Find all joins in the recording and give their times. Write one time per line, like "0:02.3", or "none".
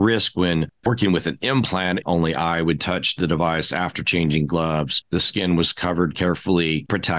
0:02.0